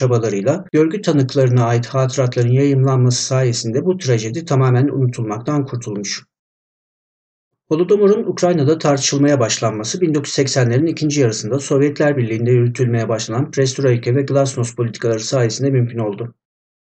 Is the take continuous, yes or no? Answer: yes